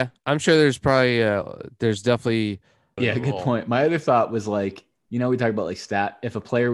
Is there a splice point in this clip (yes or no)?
yes